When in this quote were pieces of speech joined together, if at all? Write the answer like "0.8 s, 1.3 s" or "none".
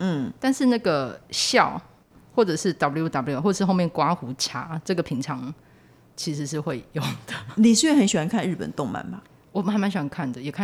none